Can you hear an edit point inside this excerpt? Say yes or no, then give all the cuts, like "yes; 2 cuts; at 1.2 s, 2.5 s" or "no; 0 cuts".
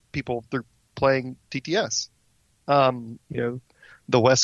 yes; 1 cut; at 3.2 s